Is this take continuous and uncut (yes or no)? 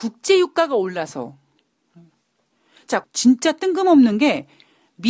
no